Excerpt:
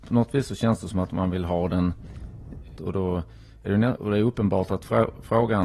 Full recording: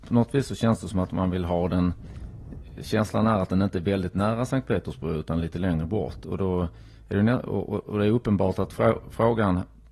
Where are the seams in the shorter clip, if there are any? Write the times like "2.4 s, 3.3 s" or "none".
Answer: 2.8 s, 4.0 s